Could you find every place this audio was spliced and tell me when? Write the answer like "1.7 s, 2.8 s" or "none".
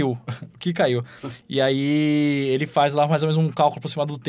1.4 s